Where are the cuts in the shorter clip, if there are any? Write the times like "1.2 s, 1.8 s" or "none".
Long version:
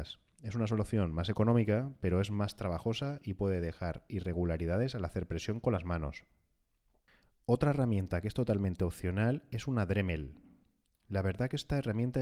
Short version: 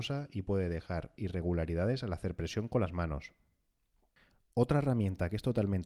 none